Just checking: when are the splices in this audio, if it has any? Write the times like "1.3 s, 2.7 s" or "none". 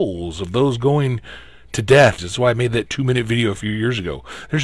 2.2 s